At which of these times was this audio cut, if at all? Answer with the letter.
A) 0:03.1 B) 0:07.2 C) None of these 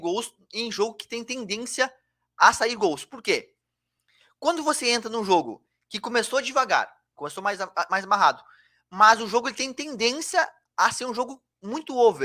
B